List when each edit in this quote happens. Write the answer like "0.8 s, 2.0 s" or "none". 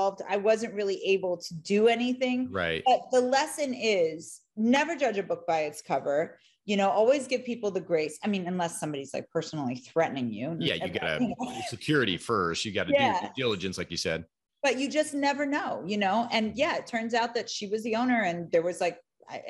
none